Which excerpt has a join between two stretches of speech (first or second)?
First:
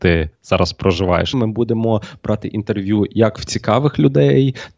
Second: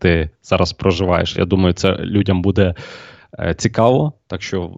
first